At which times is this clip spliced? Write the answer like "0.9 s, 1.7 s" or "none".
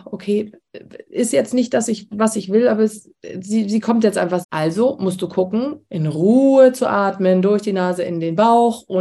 4.4 s, 5.9 s

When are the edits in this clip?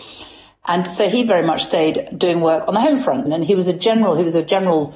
3.3 s

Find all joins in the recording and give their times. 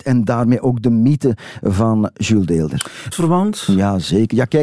3.1 s

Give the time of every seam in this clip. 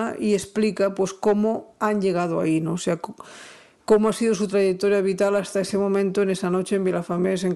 none

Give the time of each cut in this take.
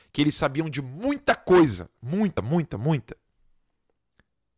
none

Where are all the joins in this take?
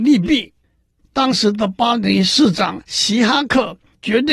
1.0 s

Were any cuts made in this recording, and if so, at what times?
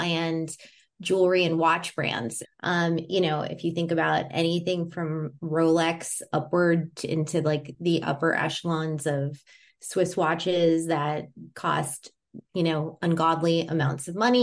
2.4 s, 12.4 s

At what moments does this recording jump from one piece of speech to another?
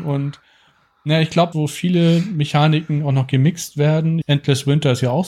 1.5 s, 4.2 s

